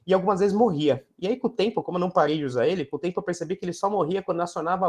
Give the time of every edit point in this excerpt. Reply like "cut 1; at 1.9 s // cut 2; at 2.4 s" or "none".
none